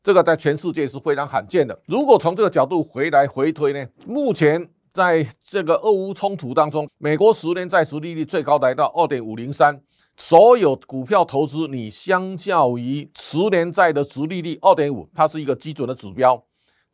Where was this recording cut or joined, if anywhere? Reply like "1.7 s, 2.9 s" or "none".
6.9 s

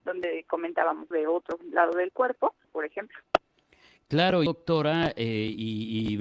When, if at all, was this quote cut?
1.1 s, 2.6 s, 4.5 s

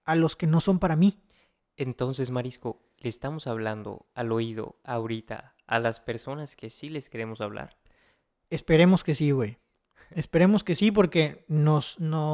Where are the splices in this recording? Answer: none

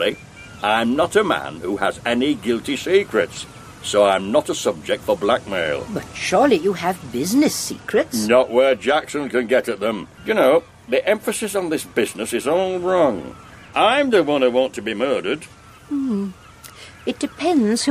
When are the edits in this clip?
10.2 s

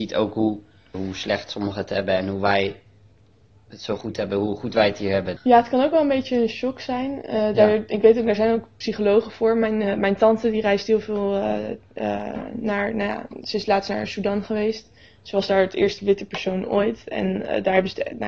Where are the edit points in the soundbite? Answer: 0.9 s, 5.4 s

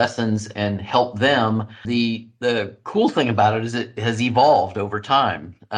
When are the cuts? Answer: 1.8 s

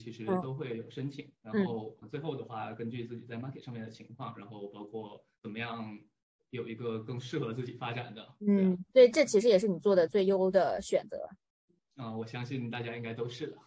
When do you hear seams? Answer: 2.0 s

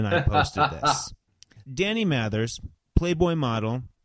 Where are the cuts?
1.6 s

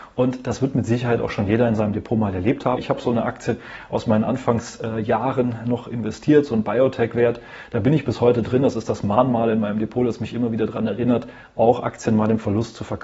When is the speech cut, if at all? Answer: 2.8 s

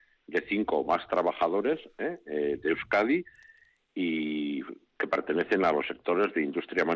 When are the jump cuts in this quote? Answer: none

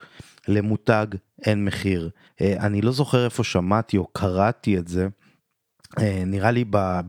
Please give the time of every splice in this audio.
2.3 s

